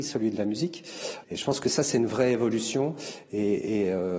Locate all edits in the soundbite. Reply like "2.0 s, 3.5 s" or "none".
1.2 s